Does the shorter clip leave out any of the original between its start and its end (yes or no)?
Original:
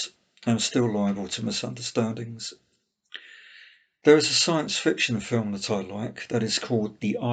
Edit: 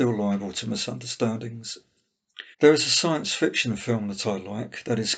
yes